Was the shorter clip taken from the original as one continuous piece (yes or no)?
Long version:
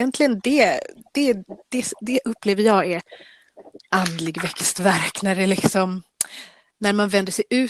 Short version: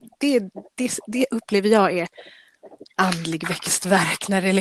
yes